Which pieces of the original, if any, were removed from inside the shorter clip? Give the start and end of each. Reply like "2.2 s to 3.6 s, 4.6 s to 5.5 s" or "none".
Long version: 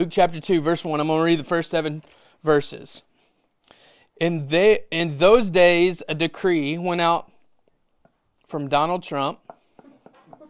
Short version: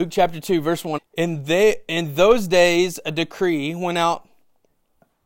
1.0 s to 4.0 s